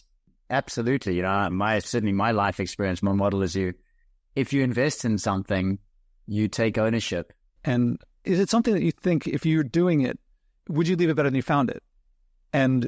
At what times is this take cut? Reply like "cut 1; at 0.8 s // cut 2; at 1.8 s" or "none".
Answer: cut 1; at 1.5 s // cut 2; at 7.6 s